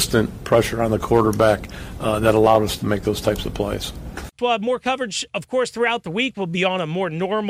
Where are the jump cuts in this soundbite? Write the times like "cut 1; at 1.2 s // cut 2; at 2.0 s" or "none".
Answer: cut 1; at 4.4 s